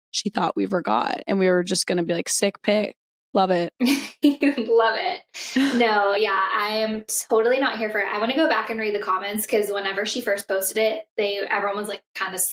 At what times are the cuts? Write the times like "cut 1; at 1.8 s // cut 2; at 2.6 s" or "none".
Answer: none